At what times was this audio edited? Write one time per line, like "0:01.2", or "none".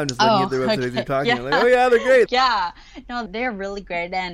0:02.3
0:03.3